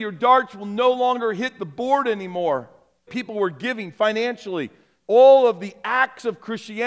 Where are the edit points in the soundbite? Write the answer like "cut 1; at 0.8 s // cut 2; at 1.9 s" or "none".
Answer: cut 1; at 3.1 s